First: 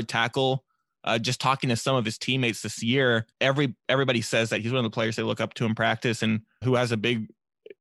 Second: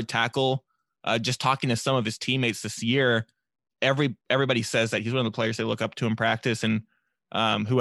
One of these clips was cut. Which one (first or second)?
first